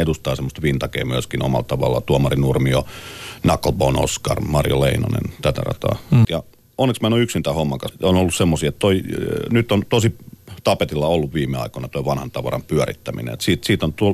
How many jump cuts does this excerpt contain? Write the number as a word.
two